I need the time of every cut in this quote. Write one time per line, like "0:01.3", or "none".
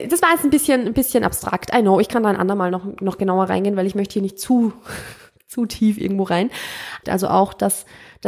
0:07.0